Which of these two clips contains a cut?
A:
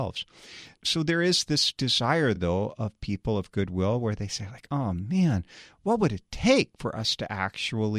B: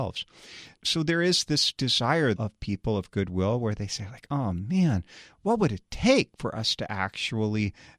B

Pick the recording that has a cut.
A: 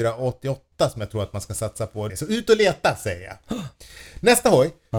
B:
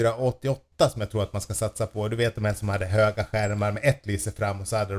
A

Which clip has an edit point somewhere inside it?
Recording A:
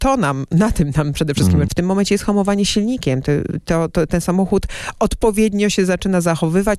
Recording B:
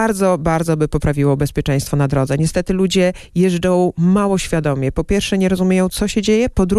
A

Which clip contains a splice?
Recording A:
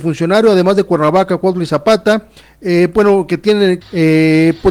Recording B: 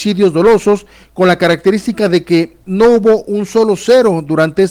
A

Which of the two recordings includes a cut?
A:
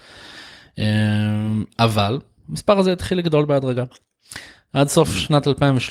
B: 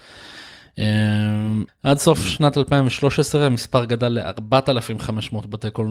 B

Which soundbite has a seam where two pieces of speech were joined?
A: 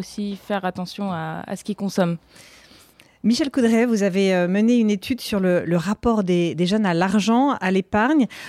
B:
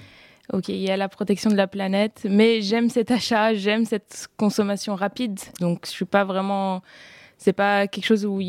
B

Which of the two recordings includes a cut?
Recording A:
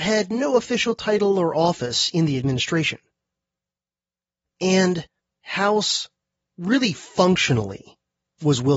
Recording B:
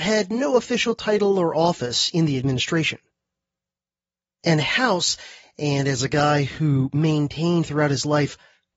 B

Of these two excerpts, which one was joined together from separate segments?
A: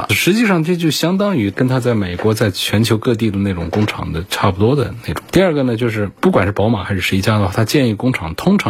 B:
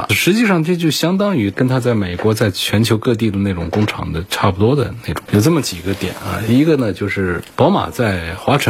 B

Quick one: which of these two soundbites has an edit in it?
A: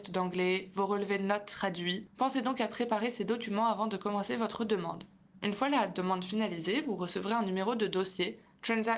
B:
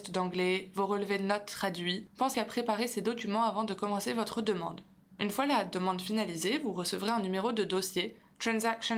B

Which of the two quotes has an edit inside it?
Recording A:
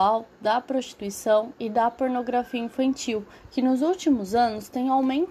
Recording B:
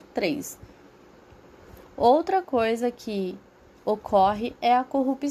B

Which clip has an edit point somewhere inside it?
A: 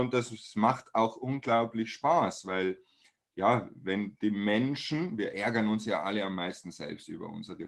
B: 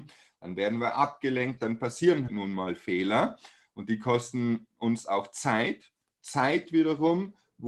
B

